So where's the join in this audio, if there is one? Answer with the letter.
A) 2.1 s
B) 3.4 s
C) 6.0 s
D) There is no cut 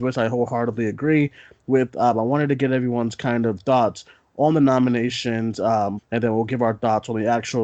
C